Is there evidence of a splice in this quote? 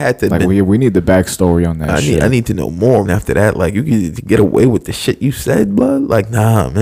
yes; 1 cut; at 3.1 s

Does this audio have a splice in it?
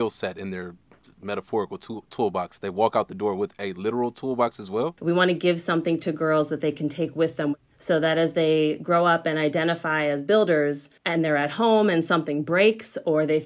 yes; 2 cuts; at 5.0 s, 11.0 s

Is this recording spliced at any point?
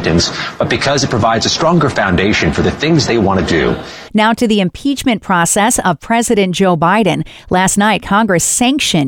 yes; 1 cut; at 4.1 s

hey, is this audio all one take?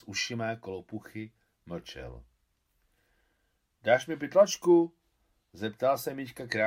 yes; 0 cuts

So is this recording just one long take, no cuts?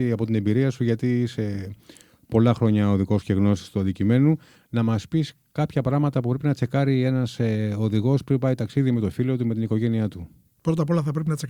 yes; 0 cuts

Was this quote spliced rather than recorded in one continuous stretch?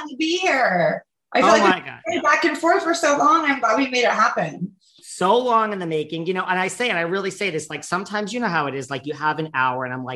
no; 0 cuts

